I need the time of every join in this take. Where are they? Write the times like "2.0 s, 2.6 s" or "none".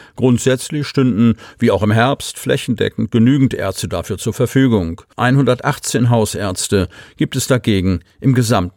5.1 s